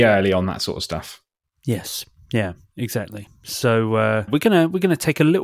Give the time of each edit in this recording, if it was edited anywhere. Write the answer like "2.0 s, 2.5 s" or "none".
4.3 s